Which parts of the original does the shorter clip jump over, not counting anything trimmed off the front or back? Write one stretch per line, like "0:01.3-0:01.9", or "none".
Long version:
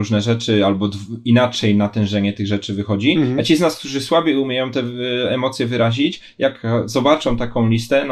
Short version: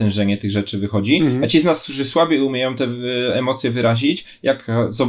none